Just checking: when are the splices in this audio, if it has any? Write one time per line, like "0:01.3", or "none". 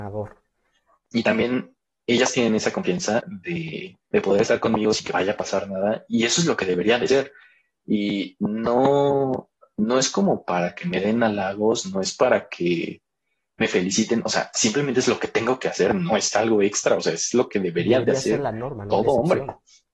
0:01.0